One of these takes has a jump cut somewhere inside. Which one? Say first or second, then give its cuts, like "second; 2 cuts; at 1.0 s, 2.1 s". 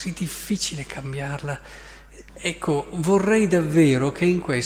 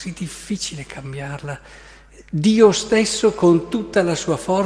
first; 1 cut; at 2.3 s